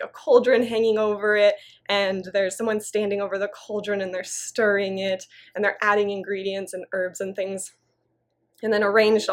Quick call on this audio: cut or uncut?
uncut